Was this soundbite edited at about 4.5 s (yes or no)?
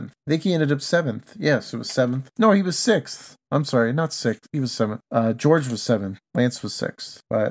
no